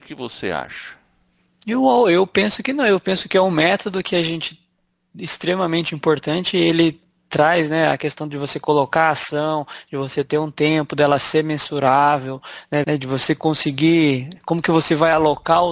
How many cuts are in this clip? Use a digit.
1